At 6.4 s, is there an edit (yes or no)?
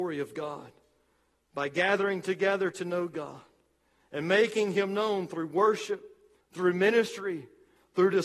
yes